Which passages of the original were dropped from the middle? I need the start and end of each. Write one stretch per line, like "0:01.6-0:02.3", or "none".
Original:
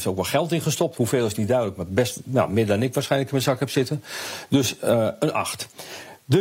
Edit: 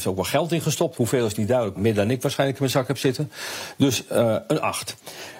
0:01.7-0:02.5